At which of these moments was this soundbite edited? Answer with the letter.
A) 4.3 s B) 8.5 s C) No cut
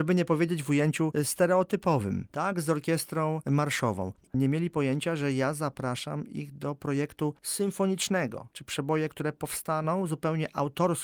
B